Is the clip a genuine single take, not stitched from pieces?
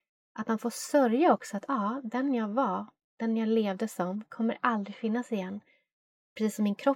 yes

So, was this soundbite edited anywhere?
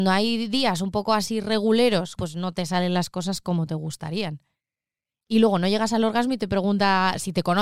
yes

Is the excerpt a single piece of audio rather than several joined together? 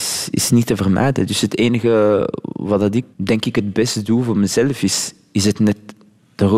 no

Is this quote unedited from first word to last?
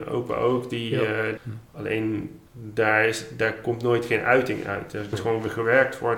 no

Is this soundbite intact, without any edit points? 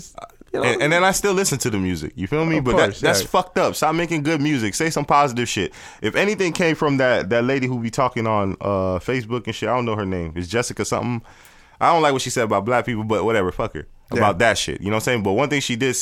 yes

